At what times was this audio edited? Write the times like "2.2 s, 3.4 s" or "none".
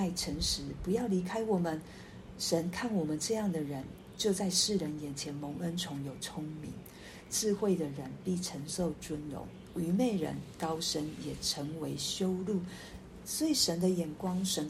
none